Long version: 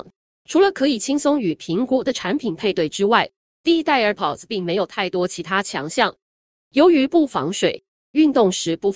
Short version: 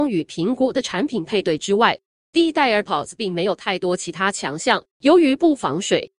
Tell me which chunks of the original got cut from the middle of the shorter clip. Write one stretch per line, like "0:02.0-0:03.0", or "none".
0:06.2-0:06.6